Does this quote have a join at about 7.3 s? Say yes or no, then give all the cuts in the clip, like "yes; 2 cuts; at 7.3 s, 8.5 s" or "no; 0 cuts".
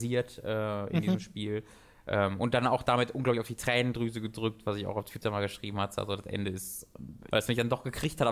yes; 1 cut; at 7.3 s